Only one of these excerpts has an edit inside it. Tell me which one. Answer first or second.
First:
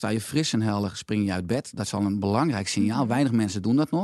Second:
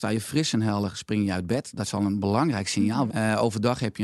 second